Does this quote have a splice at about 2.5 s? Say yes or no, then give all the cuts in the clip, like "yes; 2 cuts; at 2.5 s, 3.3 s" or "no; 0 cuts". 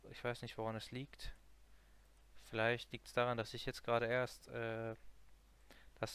no; 0 cuts